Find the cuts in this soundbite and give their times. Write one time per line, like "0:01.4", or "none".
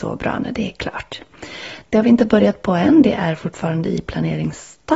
none